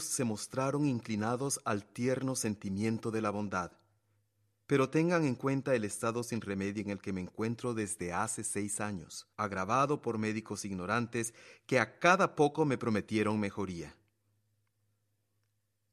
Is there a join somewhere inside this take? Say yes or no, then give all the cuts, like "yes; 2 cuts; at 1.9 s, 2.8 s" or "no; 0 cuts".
yes; 2 cuts; at 4.6 s, 9.3 s